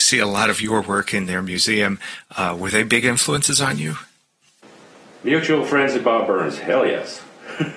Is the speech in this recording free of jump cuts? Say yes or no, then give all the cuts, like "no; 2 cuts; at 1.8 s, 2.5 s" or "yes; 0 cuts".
yes; 0 cuts